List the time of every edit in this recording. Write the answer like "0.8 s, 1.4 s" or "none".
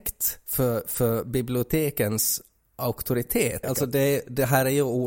3.6 s